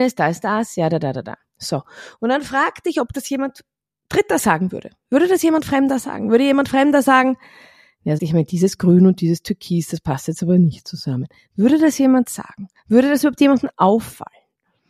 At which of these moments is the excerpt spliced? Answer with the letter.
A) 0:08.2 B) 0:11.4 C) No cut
A